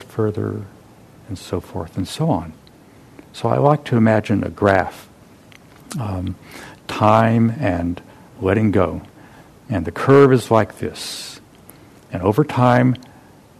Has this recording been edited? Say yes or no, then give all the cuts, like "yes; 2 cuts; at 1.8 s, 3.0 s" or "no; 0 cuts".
no; 0 cuts